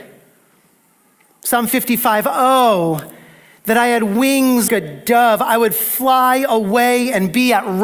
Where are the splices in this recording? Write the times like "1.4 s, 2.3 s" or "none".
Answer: 4.7 s